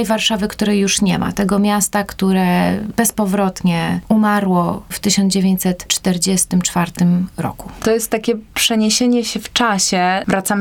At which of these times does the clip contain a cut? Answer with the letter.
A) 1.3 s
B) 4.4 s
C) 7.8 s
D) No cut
D